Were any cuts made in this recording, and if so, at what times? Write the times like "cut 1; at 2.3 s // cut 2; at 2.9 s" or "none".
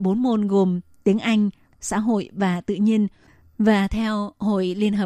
cut 1; at 1.7 s // cut 2; at 3.4 s